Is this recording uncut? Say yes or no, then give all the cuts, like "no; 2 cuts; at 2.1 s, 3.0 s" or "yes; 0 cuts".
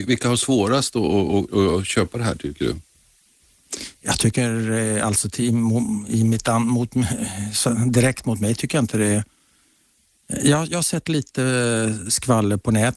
no; 1 cut; at 1.5 s